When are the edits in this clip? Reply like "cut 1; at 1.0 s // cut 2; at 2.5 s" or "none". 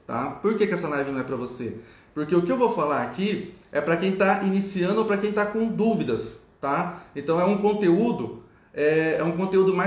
none